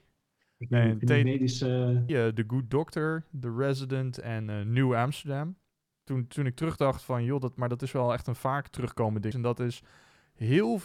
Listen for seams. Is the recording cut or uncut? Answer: cut